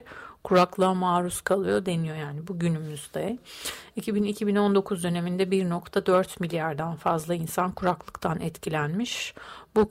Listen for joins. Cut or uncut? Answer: uncut